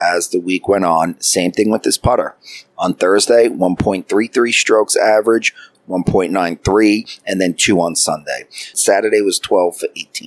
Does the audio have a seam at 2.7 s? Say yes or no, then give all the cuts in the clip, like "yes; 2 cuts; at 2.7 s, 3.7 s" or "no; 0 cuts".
no; 2 cuts; at 5.7 s, 8.7 s